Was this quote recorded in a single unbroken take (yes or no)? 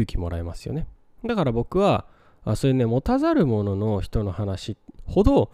yes